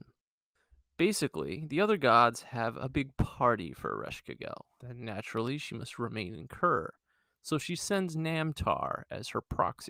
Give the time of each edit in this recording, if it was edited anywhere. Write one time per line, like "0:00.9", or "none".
0:04.8